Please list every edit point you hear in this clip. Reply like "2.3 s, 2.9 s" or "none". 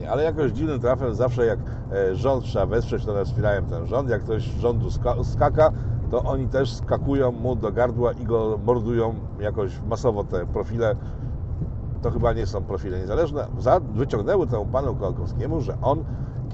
13.5 s